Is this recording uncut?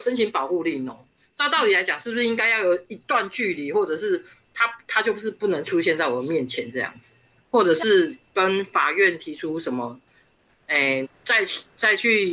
no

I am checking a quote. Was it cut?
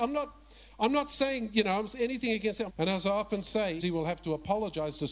yes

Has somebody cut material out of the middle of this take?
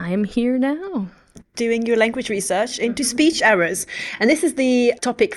no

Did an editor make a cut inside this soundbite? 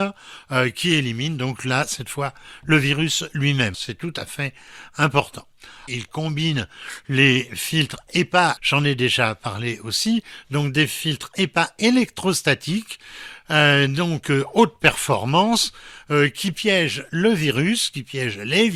yes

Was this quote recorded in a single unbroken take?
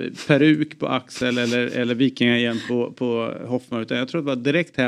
yes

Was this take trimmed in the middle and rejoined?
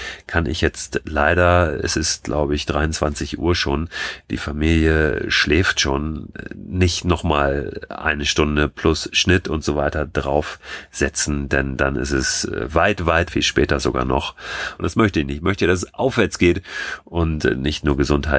yes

